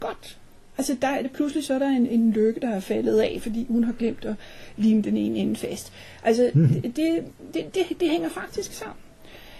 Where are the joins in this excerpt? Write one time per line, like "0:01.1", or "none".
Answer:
0:01.2